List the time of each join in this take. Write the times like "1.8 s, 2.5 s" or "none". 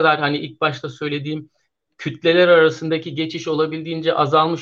none